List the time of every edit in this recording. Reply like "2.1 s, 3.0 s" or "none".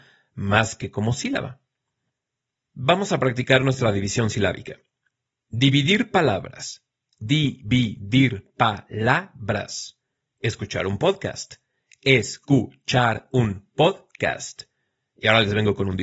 none